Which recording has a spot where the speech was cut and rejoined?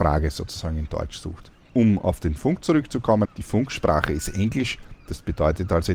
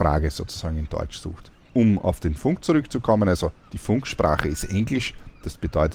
first; 1 cut; at 3.2 s

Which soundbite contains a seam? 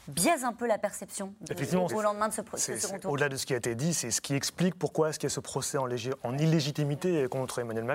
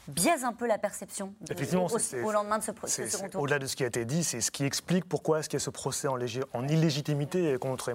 first; 1 cut; at 1.9 s

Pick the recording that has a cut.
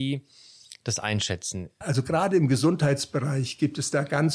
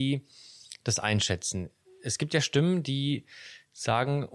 first; 1 cut; at 1.8 s

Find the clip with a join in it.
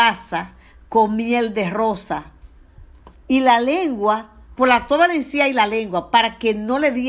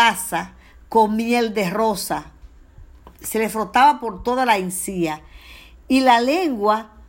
first; 2 cuts; at 3.1 s, 4.6 s

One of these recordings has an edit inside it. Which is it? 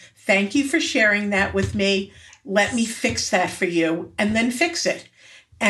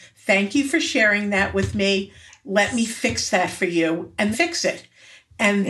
second; 1 cut; at 4.3 s

